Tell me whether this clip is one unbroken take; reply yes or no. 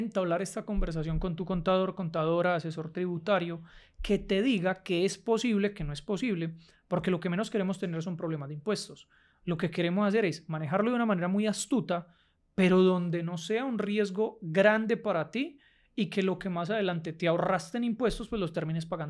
yes